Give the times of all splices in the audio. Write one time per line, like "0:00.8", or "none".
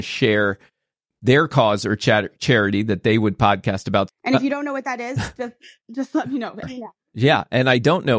0:04.1
0:06.6